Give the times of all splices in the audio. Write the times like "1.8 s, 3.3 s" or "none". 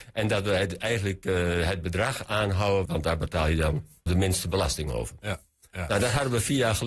2.8 s, 4.1 s